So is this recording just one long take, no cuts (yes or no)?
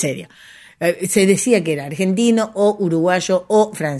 yes